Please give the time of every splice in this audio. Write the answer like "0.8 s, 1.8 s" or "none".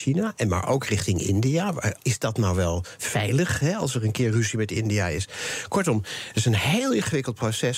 2.0 s